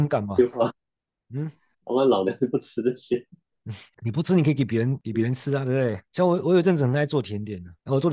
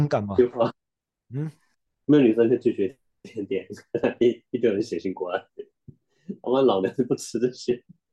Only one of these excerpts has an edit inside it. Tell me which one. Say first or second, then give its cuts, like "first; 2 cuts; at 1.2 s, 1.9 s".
first; 1 cut; at 1.8 s